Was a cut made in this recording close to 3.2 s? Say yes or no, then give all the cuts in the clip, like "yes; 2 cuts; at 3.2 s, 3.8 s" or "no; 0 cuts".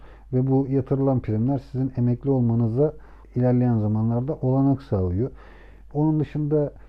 yes; 1 cut; at 3.2 s